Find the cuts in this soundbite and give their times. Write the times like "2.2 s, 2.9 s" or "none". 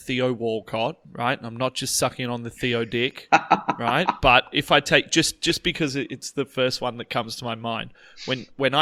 none